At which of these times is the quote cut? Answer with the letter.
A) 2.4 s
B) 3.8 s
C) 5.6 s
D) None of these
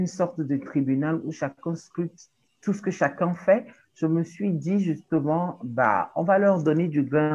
A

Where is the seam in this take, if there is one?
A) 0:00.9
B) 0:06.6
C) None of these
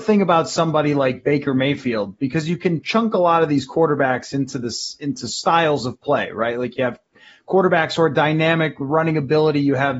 C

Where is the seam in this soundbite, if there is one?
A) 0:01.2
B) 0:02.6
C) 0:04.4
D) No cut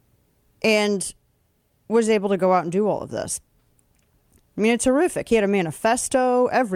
D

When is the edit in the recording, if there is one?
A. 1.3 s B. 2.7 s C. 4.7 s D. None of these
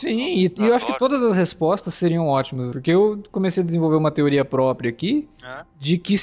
B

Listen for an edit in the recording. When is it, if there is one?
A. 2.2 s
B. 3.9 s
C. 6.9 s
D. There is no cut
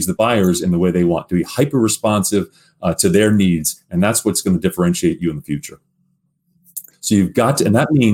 C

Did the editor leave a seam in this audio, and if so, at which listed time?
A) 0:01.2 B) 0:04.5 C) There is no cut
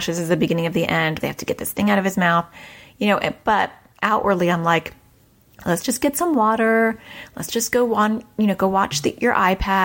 A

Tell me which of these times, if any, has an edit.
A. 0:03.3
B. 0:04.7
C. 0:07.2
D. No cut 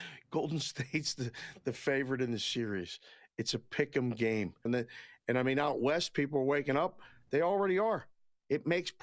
B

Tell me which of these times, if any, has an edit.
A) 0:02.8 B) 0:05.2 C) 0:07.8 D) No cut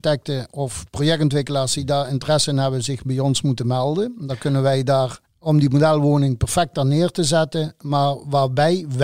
B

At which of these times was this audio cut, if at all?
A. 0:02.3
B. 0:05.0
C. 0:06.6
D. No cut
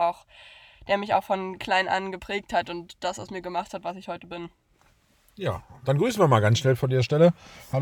D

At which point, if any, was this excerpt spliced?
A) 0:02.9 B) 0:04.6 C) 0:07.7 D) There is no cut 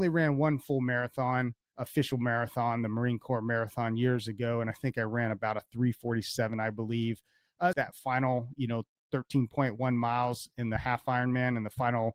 C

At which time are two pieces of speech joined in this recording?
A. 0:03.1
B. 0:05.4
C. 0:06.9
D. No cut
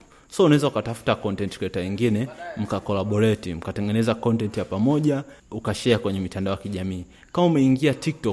B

